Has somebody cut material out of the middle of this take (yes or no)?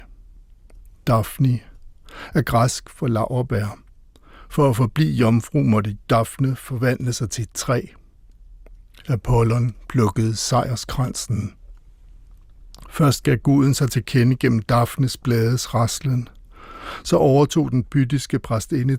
no